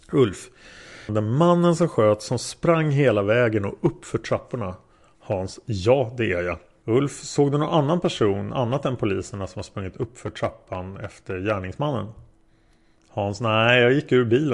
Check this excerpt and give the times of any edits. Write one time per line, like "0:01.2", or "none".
0:01.1
0:06.8